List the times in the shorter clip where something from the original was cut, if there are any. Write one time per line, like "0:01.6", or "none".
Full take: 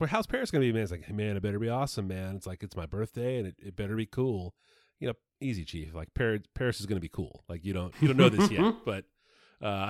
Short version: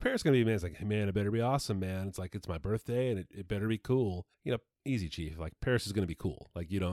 0:04.3
0:05.6